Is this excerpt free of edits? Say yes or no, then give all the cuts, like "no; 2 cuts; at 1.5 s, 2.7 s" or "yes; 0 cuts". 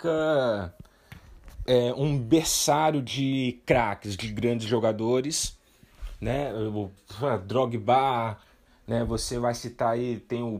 yes; 0 cuts